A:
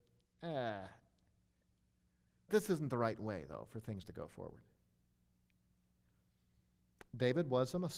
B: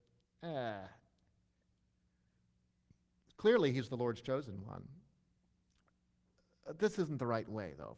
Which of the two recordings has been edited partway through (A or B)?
A